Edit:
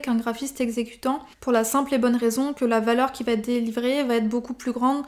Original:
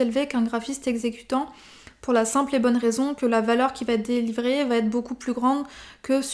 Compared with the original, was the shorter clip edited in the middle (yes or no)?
yes